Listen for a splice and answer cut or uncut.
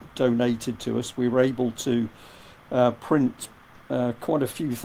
uncut